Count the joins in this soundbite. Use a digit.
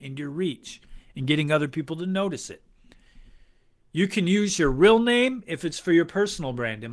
0